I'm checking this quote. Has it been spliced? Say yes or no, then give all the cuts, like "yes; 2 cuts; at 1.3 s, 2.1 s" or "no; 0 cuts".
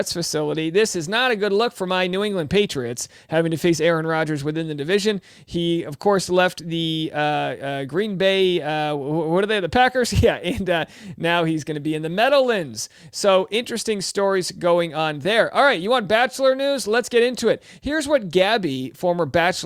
no; 0 cuts